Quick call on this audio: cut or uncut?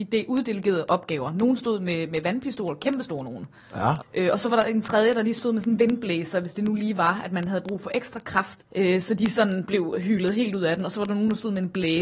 cut